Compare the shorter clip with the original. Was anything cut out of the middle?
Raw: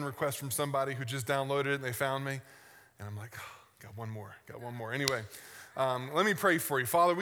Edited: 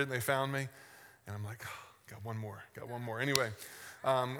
no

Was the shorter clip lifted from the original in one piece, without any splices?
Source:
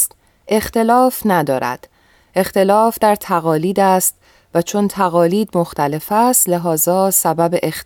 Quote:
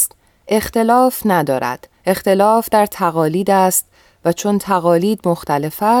no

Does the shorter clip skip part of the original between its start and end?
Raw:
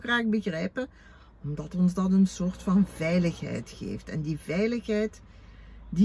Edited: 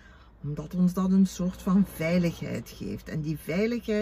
no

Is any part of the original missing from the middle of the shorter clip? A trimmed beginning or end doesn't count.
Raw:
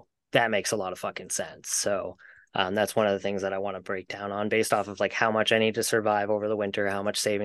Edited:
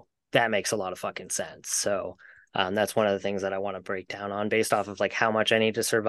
no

